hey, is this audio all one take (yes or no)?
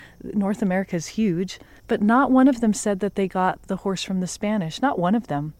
no